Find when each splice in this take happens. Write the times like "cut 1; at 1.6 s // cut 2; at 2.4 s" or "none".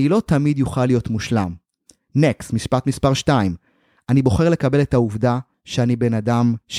none